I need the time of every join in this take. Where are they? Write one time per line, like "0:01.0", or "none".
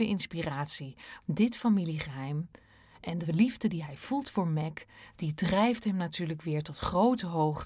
0:01.2